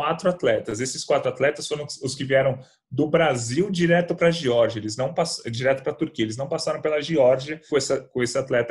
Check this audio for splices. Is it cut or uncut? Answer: cut